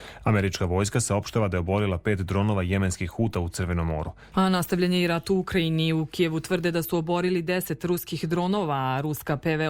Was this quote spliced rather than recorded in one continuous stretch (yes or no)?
yes